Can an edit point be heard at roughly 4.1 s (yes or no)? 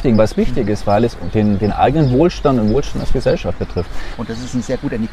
yes